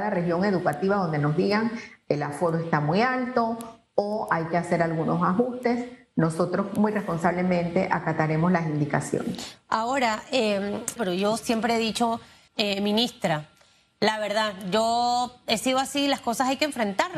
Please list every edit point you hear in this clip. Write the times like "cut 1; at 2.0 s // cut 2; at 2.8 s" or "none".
cut 1; at 11.0 s // cut 2; at 12.5 s